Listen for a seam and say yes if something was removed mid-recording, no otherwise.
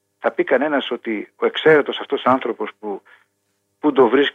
no